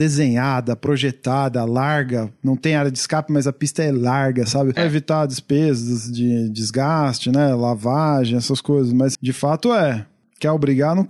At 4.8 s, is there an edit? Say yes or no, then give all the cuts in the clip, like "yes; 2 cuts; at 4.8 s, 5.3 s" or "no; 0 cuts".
yes; 2 cuts; at 4.8 s, 9.1 s